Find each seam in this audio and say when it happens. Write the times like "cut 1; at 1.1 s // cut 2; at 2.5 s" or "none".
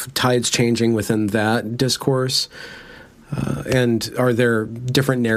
none